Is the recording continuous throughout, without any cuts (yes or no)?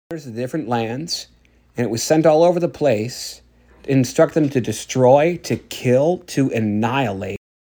yes